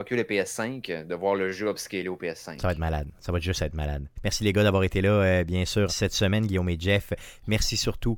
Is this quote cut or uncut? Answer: cut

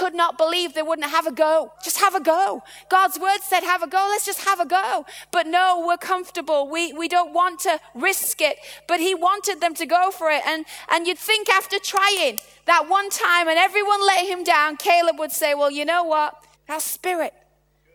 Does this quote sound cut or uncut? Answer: cut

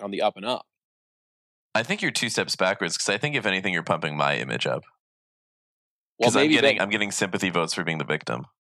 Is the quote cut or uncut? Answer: cut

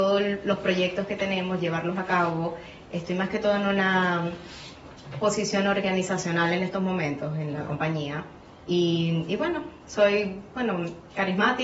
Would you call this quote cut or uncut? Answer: uncut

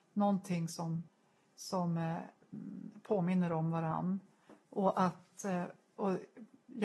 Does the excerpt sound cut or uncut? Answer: uncut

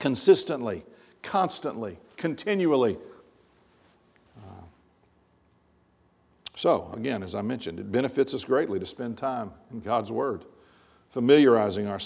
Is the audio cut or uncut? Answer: cut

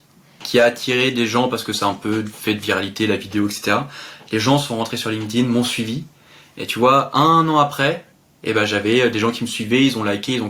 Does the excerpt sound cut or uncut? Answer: uncut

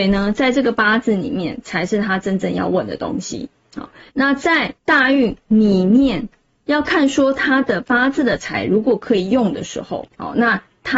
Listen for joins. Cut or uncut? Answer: cut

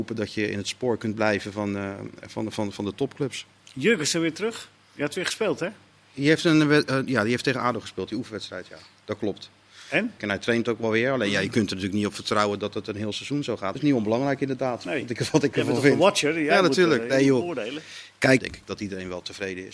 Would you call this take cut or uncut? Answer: cut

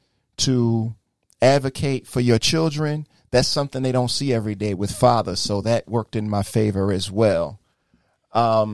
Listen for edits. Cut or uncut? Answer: uncut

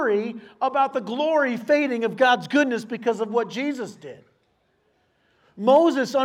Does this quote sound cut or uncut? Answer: uncut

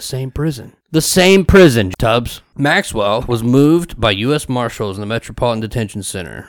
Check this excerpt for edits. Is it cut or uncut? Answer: cut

